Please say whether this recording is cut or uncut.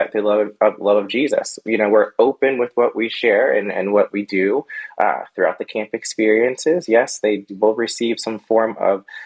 uncut